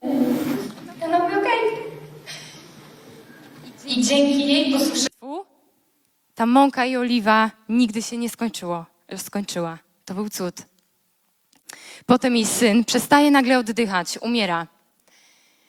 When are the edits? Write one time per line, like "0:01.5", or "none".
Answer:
none